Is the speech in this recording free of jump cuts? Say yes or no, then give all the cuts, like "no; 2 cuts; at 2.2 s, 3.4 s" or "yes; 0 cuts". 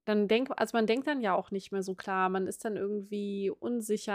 yes; 0 cuts